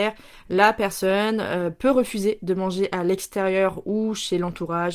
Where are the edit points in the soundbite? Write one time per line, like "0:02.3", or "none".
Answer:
none